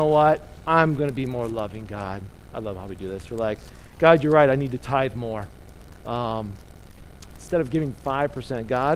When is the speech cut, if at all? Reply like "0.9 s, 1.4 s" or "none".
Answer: 7.3 s